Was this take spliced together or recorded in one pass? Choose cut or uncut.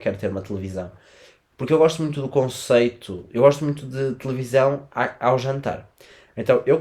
uncut